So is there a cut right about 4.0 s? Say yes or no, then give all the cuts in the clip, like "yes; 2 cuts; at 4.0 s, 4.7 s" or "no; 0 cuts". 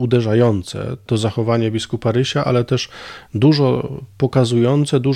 no; 1 cut; at 1.1 s